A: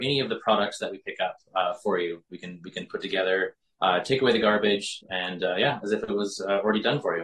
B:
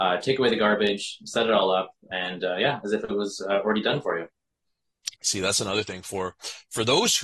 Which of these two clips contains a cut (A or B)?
A